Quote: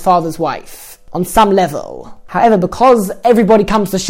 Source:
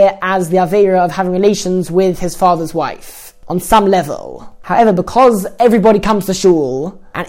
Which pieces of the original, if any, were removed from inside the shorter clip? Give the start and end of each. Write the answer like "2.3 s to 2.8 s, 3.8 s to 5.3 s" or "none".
none